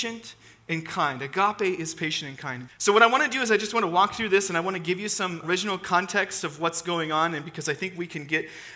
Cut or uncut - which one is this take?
cut